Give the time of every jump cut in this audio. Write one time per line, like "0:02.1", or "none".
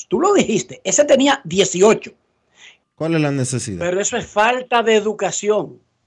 0:02.8